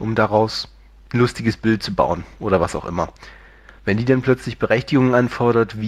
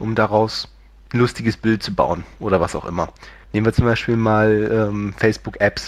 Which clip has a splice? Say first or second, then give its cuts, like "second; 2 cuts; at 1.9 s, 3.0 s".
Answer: second; 1 cut; at 3.4 s